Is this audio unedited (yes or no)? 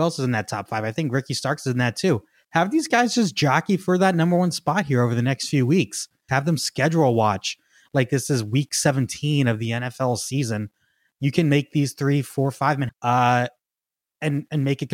no